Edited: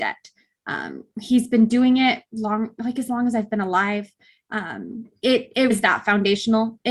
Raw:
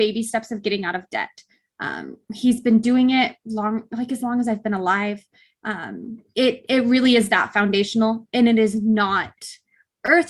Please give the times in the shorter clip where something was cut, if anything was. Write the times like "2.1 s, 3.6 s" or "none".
5.7 s